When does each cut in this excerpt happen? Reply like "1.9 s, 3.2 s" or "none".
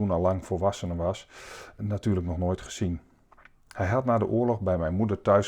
1.8 s